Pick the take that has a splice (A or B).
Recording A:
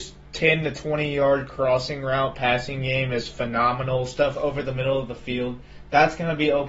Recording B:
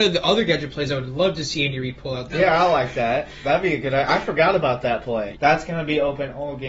B